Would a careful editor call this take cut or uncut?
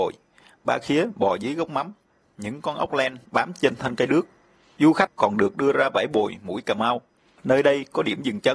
uncut